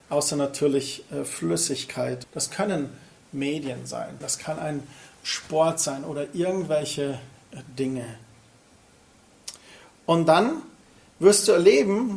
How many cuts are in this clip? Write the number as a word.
two